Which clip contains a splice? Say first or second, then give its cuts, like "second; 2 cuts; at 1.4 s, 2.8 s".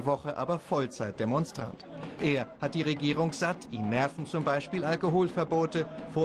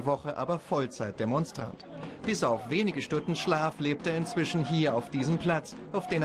first; 1 cut; at 2.2 s